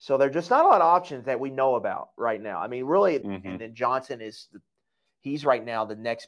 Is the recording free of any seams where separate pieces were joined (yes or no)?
no